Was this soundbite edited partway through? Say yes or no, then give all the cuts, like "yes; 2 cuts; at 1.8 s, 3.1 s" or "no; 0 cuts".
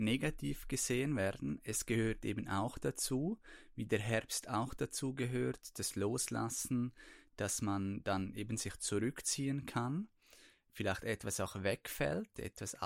no; 0 cuts